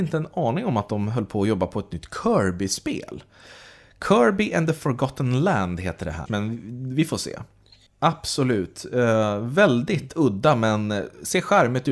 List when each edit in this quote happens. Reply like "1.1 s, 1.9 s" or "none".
6.3 s, 7.9 s